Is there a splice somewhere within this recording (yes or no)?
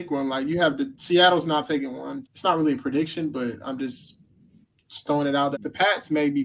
yes